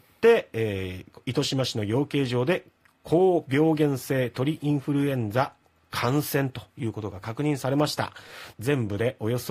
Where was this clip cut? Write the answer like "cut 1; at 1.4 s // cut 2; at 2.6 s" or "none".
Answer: cut 1; at 8.5 s